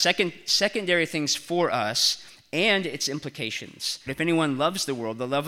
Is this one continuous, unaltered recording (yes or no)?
no